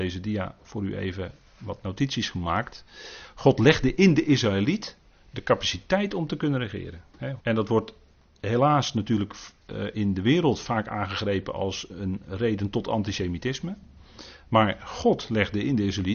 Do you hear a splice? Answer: yes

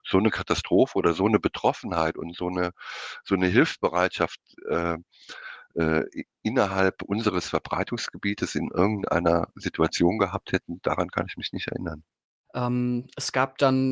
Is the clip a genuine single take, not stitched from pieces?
no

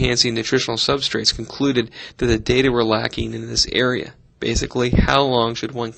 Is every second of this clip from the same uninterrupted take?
yes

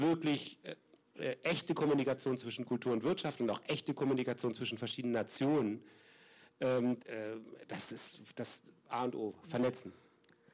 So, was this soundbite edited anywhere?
yes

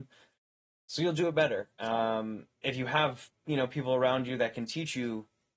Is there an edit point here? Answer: no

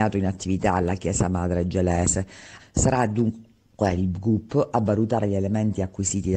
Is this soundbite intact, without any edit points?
no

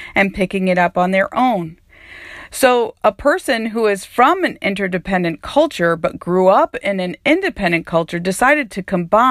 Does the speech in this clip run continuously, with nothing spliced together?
yes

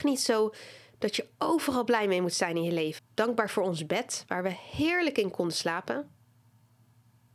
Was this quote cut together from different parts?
yes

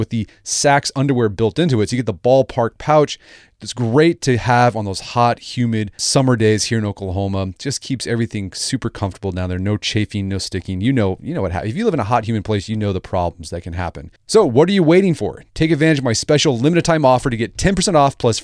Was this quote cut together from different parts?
yes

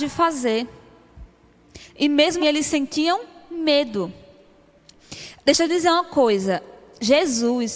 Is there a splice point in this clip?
yes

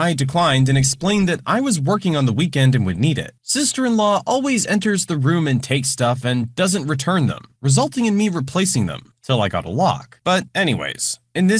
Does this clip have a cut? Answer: yes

